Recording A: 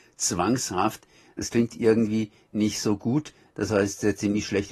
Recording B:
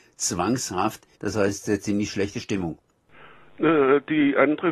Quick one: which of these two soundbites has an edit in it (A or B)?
B